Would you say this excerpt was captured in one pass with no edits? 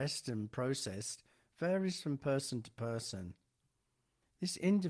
yes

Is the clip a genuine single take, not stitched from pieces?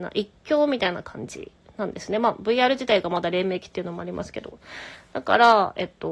yes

